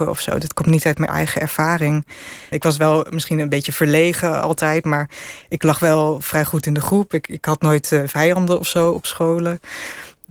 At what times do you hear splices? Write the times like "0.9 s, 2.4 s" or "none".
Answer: 2.5 s